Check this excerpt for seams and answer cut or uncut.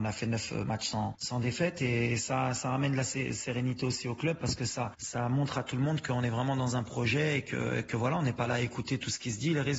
uncut